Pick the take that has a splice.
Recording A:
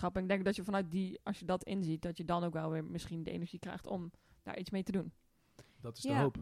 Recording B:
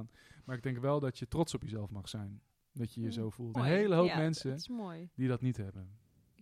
B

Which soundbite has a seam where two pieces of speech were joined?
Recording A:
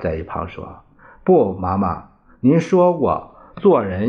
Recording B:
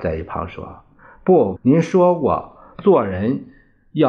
B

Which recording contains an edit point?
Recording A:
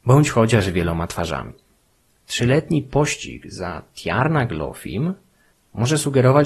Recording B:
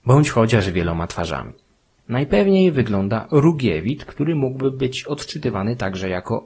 B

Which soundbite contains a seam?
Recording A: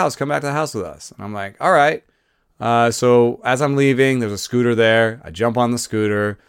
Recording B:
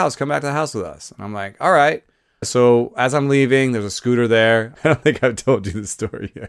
B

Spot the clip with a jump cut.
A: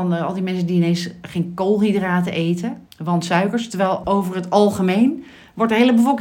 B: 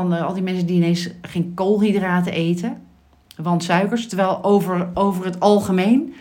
A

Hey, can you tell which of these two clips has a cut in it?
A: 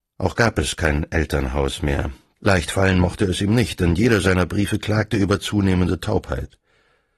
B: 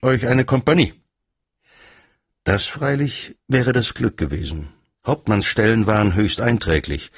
A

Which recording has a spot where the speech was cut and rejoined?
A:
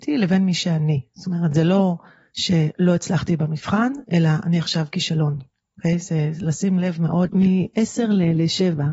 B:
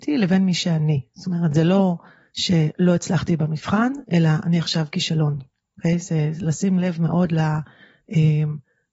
A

